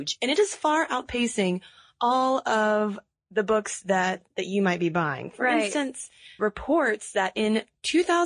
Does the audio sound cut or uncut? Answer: cut